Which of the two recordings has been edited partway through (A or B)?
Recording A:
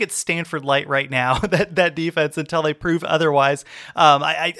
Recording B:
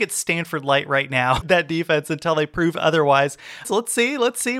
B